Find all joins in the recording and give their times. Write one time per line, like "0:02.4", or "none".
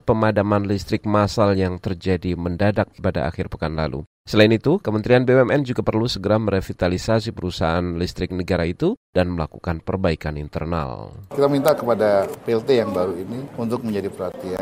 0:04.8